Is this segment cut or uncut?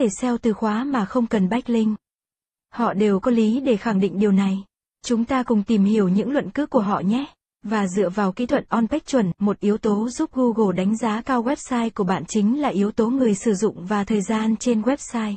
cut